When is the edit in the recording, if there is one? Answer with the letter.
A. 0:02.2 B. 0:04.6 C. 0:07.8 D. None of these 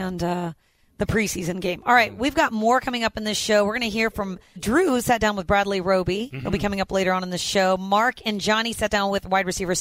B